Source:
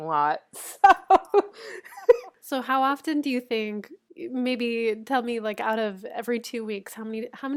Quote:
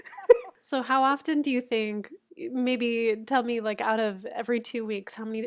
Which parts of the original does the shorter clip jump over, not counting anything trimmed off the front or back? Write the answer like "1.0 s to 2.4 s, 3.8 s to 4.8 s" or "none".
none